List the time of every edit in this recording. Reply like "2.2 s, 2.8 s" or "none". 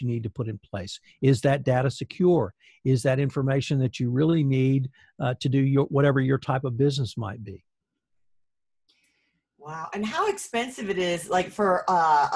none